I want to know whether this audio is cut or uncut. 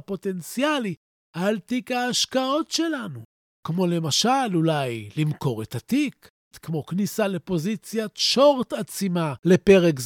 cut